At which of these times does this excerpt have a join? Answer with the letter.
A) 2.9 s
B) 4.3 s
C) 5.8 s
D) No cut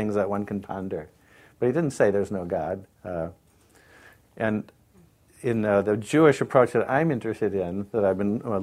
A